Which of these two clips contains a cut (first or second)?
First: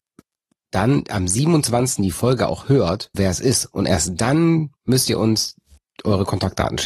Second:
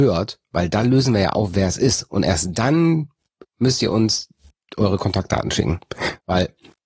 first